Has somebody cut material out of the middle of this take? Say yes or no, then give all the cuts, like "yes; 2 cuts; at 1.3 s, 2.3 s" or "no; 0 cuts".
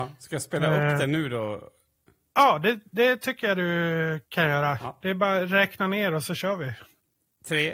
no; 0 cuts